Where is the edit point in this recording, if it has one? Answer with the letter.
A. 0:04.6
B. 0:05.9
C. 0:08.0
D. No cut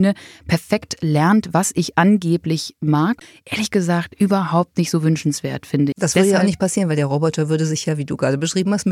B